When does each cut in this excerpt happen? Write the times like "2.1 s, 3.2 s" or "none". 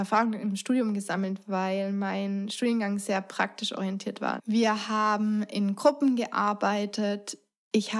4.4 s